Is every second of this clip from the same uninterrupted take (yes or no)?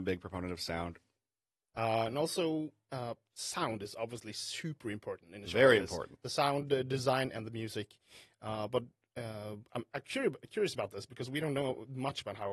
no